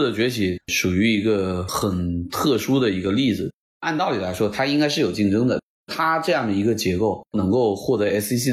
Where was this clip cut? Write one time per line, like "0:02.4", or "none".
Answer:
none